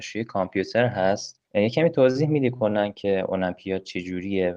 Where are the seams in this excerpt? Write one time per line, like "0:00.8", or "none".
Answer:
0:01.5